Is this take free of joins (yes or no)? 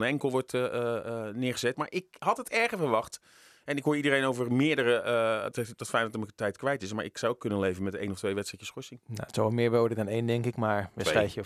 no